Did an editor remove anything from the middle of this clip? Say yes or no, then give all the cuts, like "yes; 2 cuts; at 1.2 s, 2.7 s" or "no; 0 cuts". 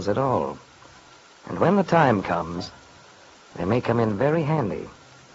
no; 0 cuts